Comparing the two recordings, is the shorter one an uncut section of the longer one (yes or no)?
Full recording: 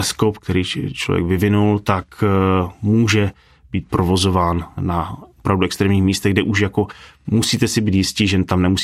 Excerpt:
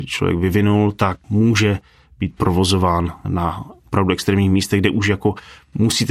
no